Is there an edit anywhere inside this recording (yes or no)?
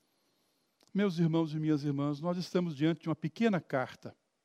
no